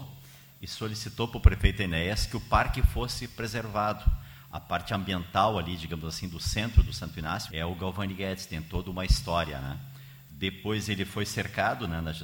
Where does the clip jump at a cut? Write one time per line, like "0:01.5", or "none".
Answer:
0:07.5